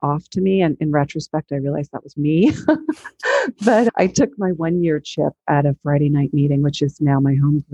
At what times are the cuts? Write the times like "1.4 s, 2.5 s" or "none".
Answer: 2.2 s